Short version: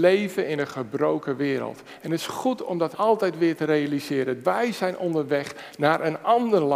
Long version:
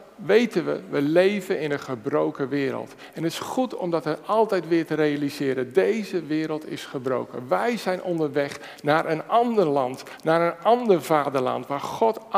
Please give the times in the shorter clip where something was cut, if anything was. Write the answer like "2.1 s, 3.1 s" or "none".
2.9 s, 4.4 s

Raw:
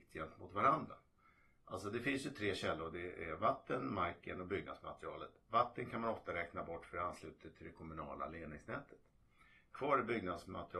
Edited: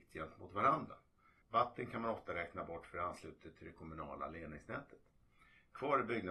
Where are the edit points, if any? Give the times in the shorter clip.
1.4 s

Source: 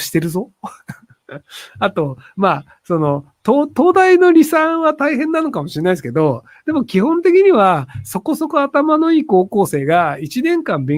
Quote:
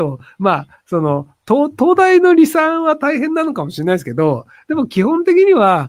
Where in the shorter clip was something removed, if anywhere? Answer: none

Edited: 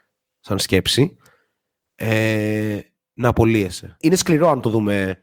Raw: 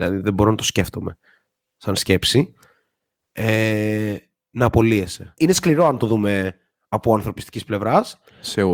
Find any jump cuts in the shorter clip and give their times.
none

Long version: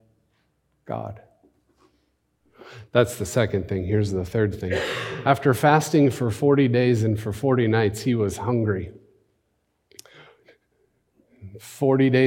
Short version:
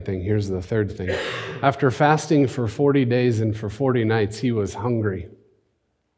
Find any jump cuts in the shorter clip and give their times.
none

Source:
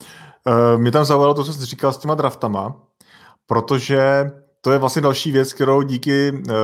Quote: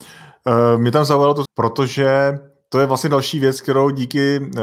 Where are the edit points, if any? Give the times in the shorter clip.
1.4 s

